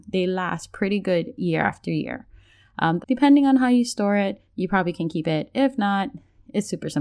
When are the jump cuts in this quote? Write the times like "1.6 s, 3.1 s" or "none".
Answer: 3.0 s